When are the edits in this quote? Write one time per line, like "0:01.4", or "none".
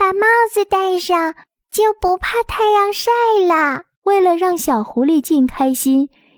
0:03.9
0:05.2